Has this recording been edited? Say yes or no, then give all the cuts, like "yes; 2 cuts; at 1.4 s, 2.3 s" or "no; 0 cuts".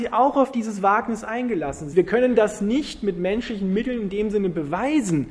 yes; 1 cut; at 1.9 s